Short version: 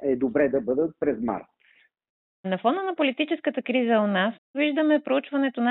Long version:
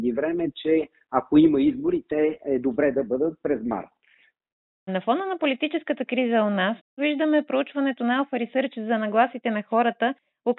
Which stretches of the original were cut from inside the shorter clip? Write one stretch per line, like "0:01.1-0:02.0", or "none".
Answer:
none